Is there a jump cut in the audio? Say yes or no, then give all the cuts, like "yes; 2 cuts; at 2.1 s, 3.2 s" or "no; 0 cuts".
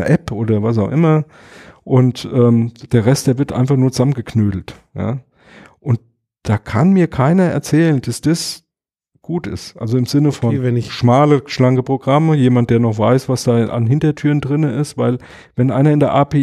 no; 0 cuts